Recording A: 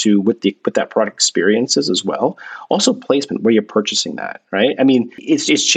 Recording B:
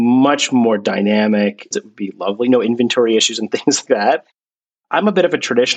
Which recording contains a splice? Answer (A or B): B